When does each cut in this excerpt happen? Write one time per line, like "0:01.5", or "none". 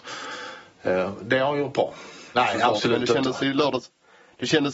0:02.3